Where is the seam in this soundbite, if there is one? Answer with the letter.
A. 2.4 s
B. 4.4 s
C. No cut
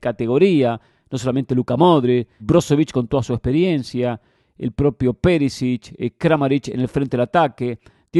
A